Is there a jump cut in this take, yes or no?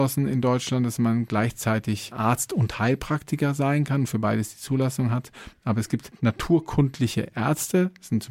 no